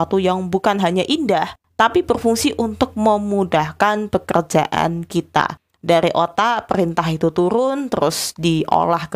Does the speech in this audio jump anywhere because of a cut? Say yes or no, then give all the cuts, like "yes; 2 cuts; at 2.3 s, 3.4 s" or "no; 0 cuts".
no; 0 cuts